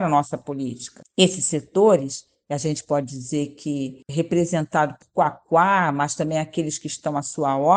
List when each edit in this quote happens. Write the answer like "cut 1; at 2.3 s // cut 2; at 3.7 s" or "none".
none

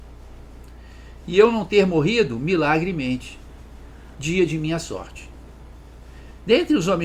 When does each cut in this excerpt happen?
cut 1; at 1.2 s // cut 2; at 4.1 s

